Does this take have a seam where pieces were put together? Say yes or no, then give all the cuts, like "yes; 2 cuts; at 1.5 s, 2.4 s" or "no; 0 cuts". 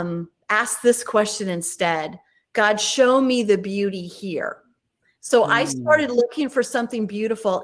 no; 0 cuts